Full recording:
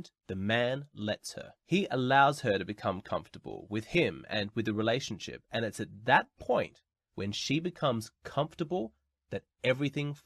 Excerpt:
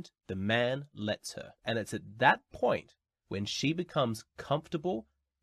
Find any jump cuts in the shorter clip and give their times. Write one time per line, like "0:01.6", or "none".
0:01.6